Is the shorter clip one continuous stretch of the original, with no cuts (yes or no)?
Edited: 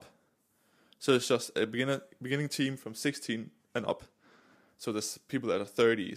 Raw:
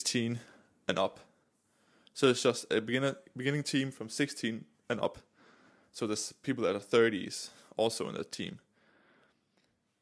yes